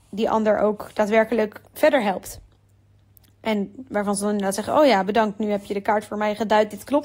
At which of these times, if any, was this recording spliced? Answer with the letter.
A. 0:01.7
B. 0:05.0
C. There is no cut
A